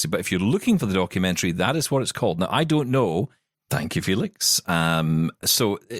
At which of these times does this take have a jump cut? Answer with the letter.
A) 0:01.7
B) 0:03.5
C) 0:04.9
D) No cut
B